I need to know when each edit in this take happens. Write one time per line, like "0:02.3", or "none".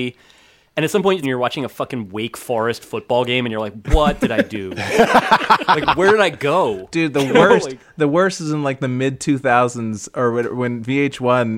0:01.2